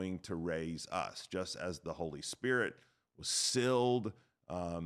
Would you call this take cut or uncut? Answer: uncut